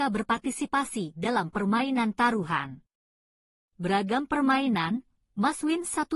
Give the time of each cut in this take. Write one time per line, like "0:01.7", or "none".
none